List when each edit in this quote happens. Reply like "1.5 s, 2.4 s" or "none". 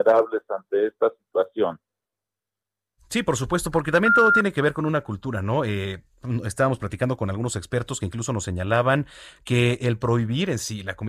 none